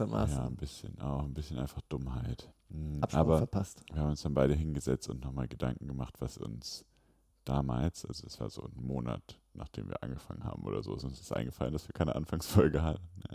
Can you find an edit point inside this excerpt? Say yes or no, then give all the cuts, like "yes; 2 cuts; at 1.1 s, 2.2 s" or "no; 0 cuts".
yes; 1 cut; at 2.5 s